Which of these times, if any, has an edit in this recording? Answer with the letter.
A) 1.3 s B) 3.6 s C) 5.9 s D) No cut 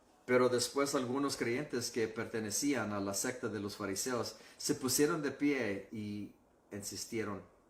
C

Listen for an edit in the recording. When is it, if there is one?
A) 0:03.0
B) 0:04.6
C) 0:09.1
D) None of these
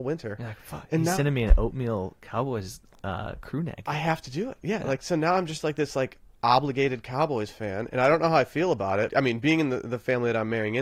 C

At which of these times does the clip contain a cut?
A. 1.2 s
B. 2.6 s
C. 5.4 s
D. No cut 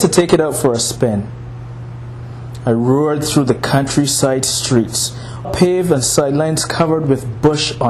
C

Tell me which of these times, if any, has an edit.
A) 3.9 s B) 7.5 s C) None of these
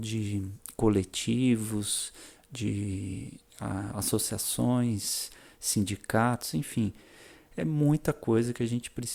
C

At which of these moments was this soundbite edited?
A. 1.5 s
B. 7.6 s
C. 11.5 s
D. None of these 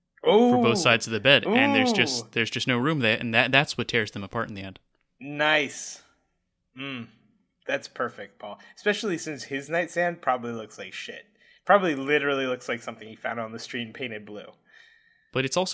D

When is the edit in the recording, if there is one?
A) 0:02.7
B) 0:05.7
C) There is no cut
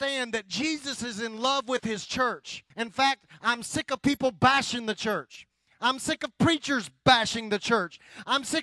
A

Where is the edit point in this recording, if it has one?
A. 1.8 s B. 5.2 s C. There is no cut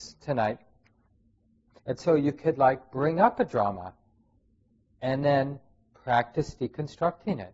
A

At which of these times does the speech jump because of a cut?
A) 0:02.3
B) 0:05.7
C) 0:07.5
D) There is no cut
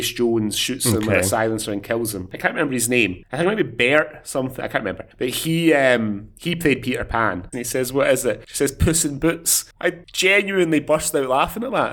C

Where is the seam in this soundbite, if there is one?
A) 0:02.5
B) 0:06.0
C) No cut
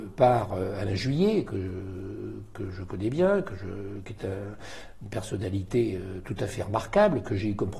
A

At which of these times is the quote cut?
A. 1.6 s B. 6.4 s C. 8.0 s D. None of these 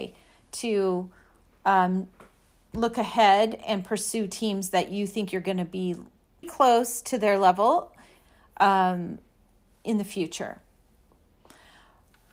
B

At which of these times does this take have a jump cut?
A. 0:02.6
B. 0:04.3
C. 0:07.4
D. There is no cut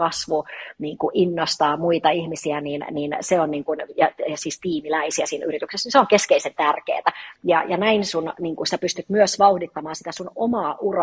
C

